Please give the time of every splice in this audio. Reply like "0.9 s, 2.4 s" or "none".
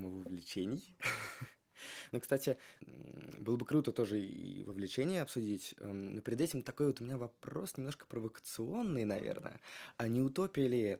none